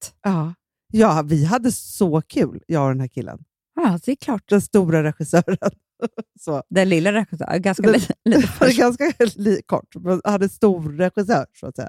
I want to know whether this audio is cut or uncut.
cut